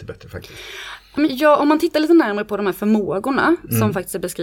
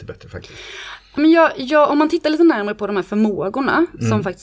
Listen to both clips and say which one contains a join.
first; 1 cut; at 1.2 s

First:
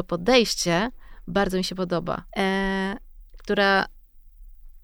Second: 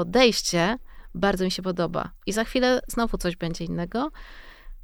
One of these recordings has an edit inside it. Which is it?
first; 1 cut; at 2.3 s

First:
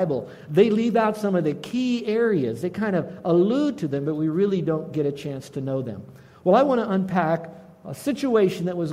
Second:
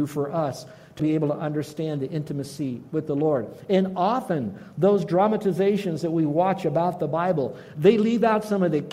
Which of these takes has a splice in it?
second; 1 cut; at 1.0 s

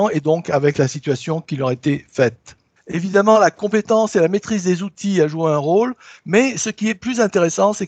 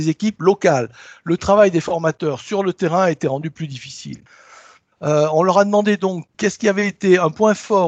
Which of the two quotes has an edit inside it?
first; 1 cut; at 2.8 s

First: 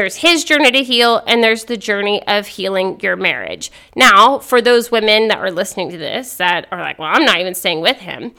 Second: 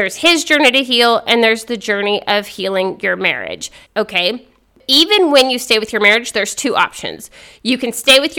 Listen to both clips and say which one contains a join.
second; 1 cut; at 3.9 s

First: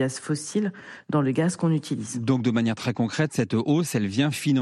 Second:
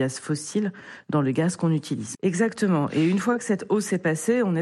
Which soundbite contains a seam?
second; 1 cut; at 2.1 s

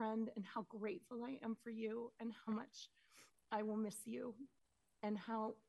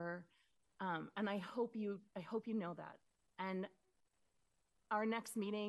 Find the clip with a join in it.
second; 1 cut; at 3.2 s

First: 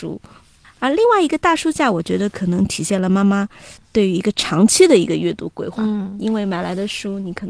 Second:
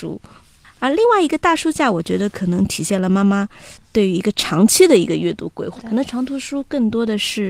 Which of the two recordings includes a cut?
second; 1 cut; at 5.8 s

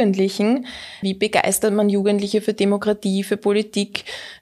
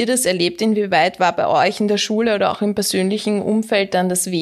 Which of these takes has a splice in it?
first; 1 cut; at 1.0 s

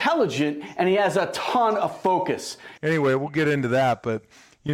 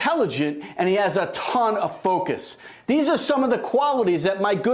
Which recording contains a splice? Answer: first; 1 cut; at 2.8 s

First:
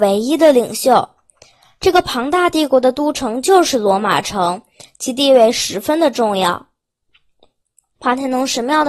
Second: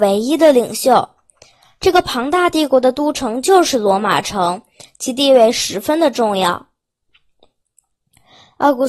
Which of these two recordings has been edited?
first; 1 cut; at 8.0 s

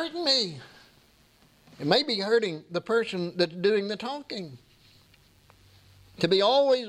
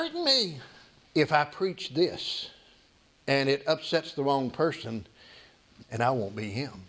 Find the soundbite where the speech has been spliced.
second; 2 cuts; at 1.0 s, 5.8 s

